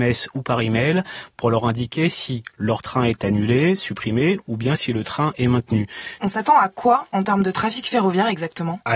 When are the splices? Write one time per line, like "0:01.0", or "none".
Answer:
0:06.2